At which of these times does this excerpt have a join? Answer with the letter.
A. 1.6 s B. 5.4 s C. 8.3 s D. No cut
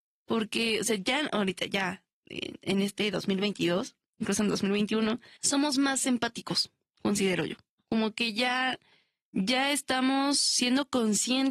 B